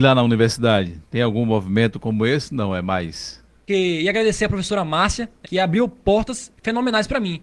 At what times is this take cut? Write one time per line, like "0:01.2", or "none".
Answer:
0:03.7
0:05.4